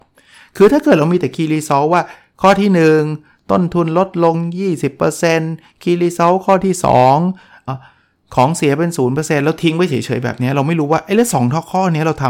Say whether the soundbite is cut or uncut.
cut